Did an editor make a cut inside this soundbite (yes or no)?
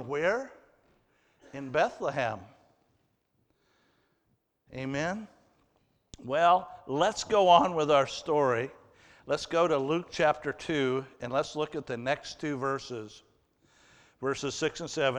no